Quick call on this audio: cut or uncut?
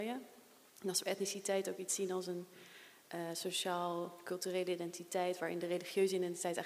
uncut